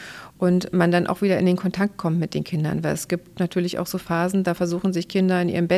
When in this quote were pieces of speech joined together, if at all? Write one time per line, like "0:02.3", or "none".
none